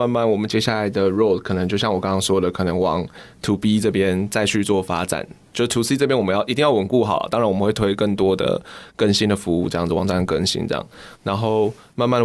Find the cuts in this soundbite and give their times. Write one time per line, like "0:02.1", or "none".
none